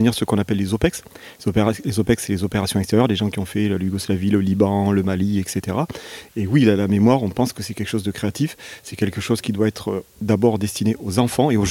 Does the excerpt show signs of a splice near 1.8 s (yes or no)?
no